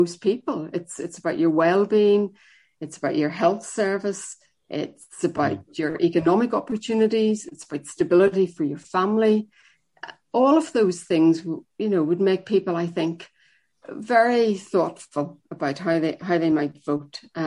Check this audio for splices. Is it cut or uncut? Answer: uncut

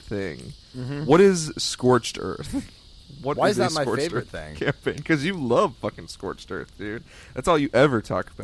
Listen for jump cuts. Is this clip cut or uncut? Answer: uncut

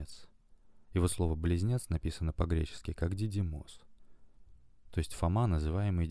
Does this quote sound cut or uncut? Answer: uncut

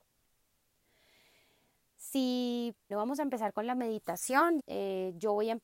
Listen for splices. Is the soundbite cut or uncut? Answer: cut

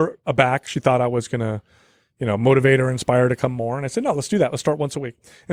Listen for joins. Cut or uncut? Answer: uncut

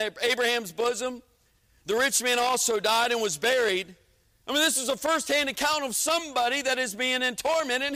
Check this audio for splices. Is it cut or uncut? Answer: cut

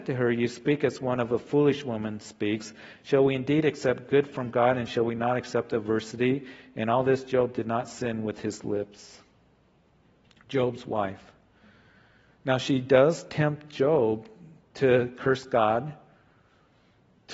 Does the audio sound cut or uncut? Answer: uncut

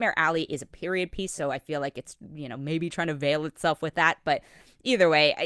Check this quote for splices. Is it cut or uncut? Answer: uncut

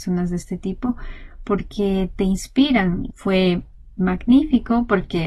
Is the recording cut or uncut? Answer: cut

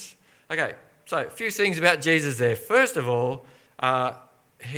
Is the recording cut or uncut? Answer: uncut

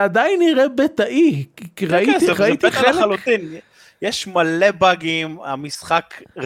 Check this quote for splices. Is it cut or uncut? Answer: uncut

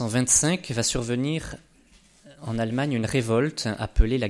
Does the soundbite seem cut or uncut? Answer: uncut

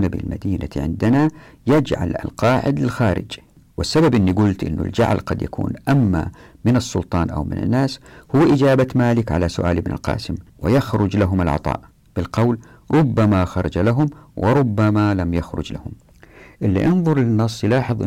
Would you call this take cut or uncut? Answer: cut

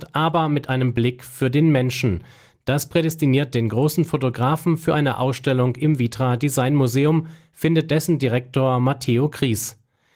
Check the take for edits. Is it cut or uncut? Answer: uncut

